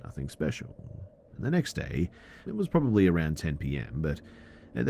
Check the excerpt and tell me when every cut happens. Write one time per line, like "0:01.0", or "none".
0:01.3
0:02.5